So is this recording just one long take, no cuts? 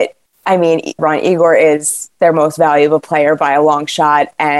no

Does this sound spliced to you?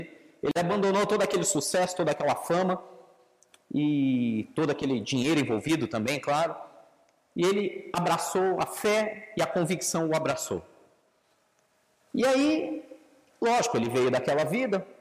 no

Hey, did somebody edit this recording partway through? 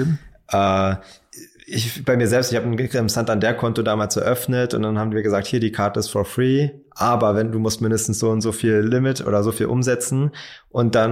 no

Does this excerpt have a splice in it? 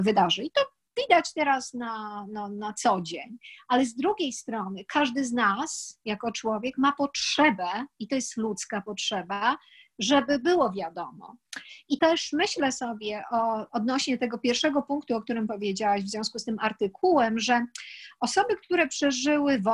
yes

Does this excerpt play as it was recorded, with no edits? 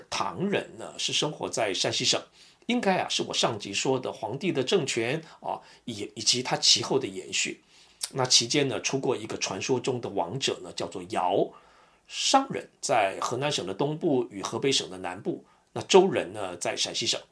yes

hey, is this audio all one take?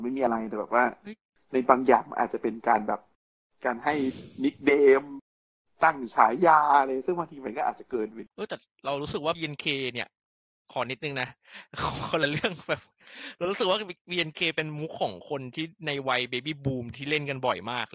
no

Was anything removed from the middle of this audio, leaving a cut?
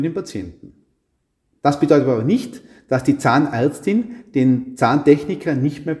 no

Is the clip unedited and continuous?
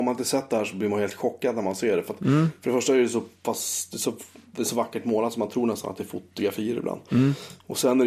yes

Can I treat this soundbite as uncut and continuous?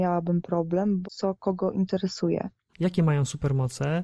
no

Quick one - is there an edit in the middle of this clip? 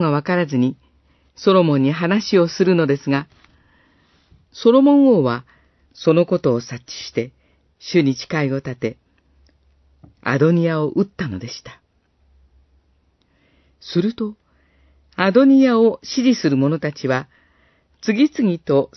no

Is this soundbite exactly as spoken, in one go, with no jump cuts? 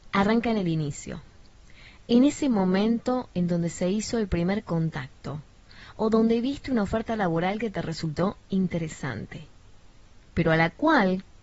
yes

